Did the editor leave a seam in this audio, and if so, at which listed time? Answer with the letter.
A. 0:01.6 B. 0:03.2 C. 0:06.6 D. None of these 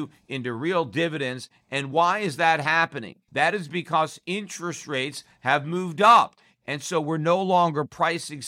D